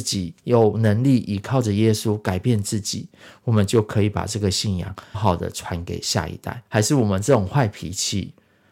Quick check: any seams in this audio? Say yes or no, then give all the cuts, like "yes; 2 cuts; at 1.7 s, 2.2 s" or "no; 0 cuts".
yes; 2 cuts; at 5.1 s, 6.7 s